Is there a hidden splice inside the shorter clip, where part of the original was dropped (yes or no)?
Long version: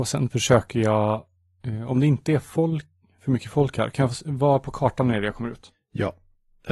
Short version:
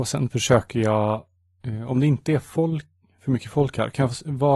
no